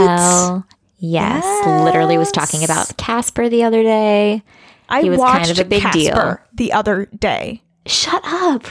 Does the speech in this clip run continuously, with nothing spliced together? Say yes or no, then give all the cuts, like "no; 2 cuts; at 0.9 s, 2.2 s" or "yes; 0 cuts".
yes; 0 cuts